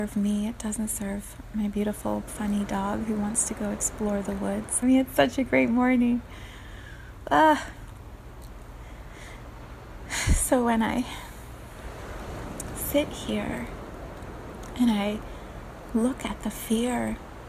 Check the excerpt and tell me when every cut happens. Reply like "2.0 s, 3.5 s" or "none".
2.3 s, 4.8 s